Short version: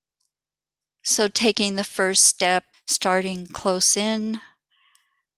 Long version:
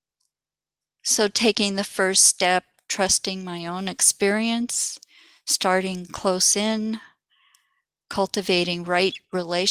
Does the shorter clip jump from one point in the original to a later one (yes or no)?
yes